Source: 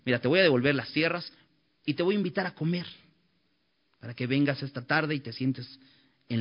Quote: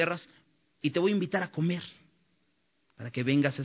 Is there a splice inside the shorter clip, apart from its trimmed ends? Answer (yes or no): no